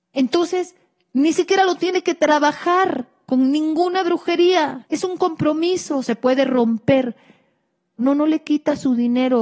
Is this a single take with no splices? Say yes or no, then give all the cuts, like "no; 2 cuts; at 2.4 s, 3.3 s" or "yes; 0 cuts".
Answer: no; 2 cuts; at 4.8 s, 8.0 s